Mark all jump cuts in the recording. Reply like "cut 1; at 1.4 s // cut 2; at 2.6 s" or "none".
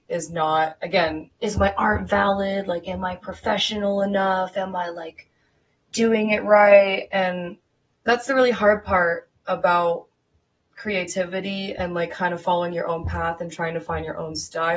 cut 1; at 1.3 s